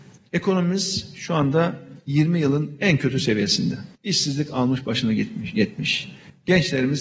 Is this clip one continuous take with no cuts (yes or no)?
no